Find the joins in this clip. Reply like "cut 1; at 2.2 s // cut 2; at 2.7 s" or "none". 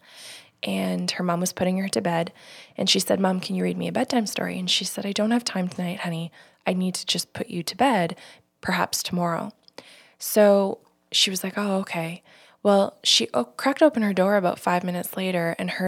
none